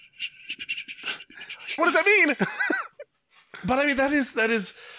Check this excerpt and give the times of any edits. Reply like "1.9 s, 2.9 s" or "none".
1.8 s